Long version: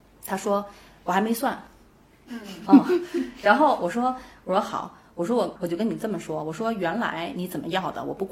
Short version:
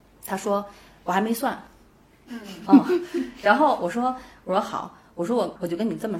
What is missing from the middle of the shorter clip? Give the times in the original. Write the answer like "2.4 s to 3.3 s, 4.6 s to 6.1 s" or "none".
none